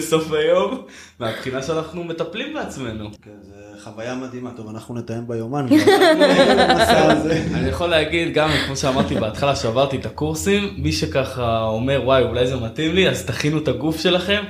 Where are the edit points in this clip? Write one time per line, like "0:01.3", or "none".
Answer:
0:03.2